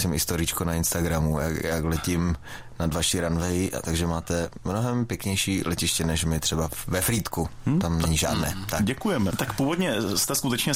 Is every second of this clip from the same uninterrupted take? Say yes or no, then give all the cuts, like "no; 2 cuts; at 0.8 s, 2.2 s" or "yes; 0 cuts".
no; 2 cuts; at 1.6 s, 9.3 s